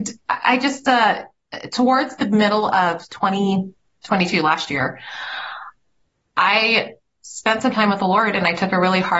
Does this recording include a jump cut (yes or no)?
no